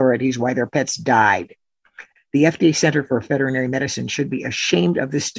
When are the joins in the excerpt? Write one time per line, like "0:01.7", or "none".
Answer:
0:02.2